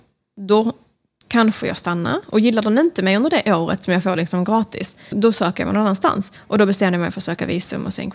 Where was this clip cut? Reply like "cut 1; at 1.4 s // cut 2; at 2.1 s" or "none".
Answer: cut 1; at 5.1 s // cut 2; at 6.4 s